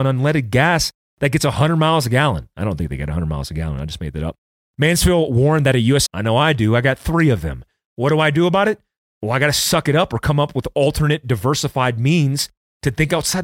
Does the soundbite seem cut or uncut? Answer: cut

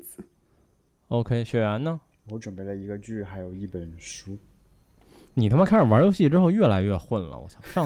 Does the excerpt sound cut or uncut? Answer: uncut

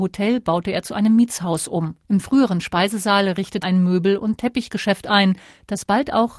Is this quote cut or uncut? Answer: cut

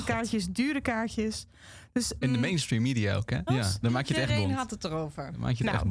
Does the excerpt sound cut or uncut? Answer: cut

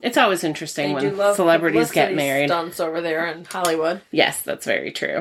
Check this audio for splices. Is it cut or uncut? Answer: uncut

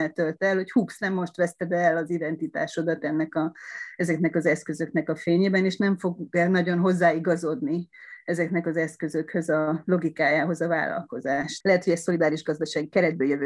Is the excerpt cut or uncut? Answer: cut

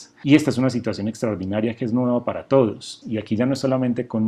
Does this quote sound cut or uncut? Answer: cut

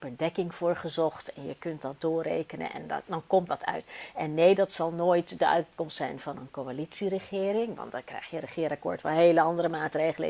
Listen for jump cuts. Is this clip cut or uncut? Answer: cut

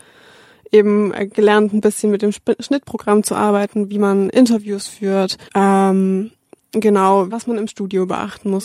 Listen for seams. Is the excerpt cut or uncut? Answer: cut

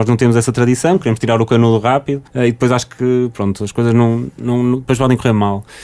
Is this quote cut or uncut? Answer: cut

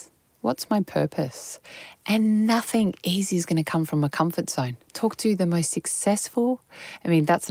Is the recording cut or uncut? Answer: cut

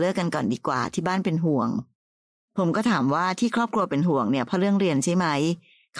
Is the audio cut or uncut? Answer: uncut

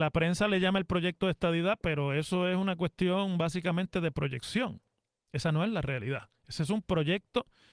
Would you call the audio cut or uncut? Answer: uncut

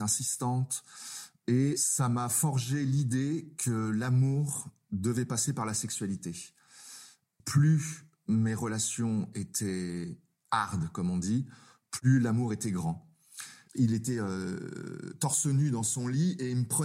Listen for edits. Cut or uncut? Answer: cut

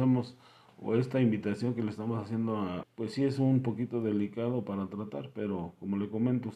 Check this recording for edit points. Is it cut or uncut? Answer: cut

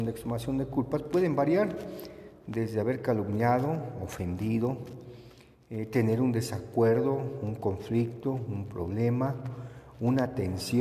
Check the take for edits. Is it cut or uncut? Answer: uncut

